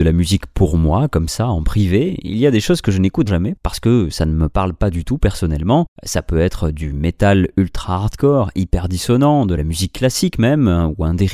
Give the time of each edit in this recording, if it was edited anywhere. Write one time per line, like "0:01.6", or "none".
0:03.3